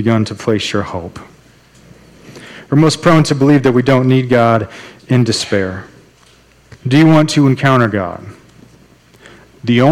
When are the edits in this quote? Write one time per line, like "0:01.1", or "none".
0:02.7
0:06.8